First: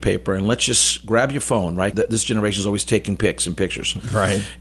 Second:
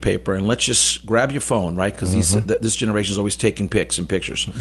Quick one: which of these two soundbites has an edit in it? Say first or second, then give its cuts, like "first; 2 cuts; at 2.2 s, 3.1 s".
first; 1 cut; at 1.9 s